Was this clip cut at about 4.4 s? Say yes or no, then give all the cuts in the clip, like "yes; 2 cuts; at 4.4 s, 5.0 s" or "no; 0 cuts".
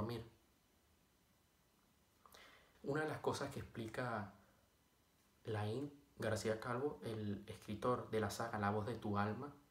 no; 1 cut; at 2.7 s